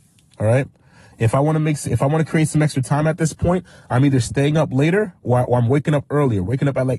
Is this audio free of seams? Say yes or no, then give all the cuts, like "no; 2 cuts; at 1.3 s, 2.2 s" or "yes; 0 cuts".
yes; 0 cuts